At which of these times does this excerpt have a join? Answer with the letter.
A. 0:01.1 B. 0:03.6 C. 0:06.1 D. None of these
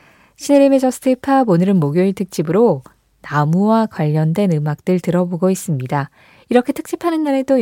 D